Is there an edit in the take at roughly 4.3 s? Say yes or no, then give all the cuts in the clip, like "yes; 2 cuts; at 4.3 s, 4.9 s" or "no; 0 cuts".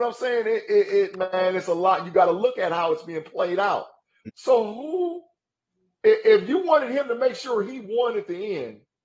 yes; 1 cut; at 4.3 s